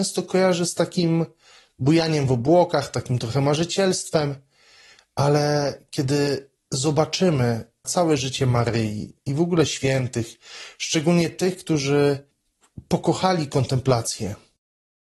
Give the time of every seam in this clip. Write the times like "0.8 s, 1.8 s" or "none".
none